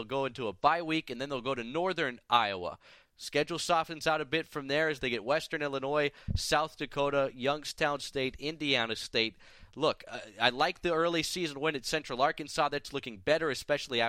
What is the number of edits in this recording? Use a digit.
0